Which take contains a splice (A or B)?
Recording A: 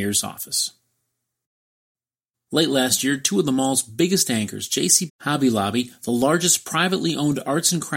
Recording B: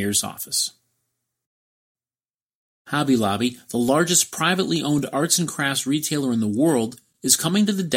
A